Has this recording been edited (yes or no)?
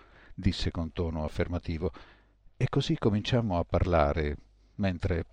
no